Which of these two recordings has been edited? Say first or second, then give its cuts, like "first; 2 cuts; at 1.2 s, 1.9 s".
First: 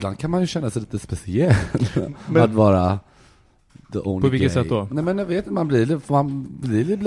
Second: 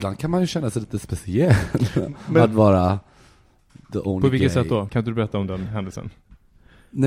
second; 1 cut; at 4.9 s